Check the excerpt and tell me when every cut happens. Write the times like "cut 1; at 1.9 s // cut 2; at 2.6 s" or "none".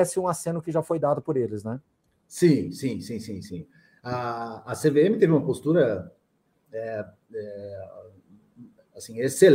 none